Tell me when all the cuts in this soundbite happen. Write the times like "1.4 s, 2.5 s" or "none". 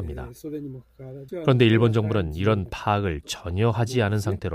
1.3 s